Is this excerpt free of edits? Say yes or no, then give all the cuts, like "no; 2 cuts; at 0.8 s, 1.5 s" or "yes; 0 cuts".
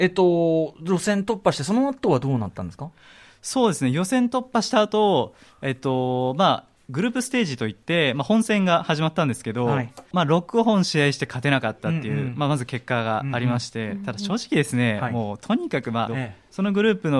no; 2 cuts; at 10.1 s, 16.1 s